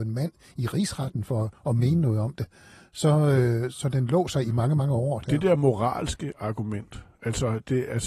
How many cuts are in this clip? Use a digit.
1